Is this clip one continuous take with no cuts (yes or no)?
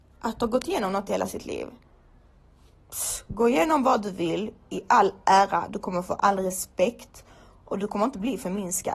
yes